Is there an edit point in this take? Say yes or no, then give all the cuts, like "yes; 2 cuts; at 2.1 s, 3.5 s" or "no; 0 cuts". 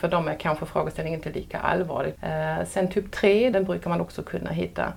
yes; 2 cuts; at 2.1 s, 3.5 s